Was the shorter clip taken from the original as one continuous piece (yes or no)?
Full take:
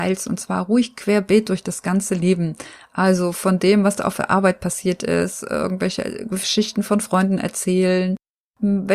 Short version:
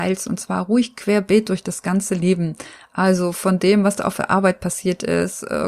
yes